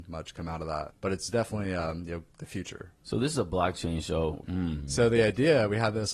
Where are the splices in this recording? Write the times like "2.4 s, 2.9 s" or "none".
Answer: 4.4 s

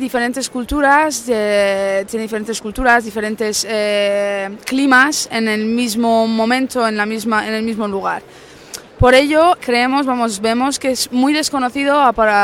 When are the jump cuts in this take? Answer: 9.6 s

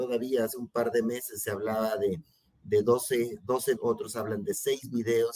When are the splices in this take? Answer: 3.8 s

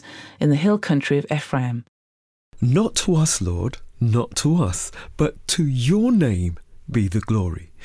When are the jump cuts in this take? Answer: 2.6 s

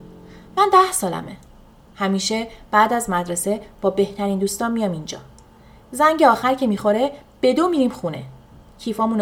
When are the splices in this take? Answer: 1.8 s

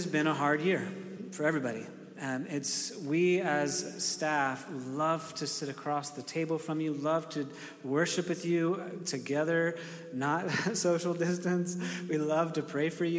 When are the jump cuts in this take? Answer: none

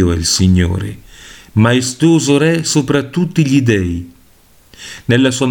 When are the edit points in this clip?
none

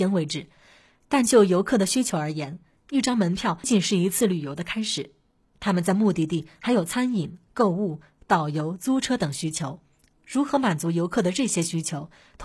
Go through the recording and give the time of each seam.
3.6 s

